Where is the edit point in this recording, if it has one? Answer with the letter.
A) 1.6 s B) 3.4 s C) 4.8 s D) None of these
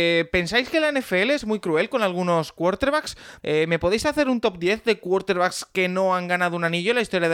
B